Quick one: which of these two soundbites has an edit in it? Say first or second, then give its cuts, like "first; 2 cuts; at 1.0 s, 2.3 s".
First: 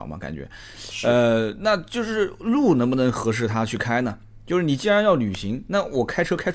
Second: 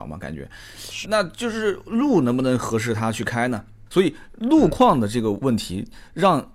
second; 2 cuts; at 1.0 s, 3.9 s